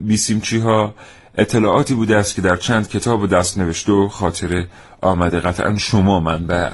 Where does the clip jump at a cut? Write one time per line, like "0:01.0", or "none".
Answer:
none